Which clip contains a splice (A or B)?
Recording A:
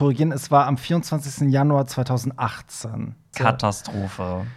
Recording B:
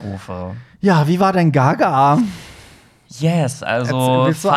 A